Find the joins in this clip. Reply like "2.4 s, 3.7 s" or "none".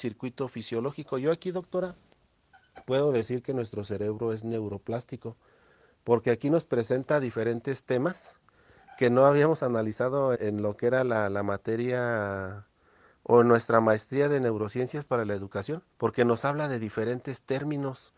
10.3 s, 15.9 s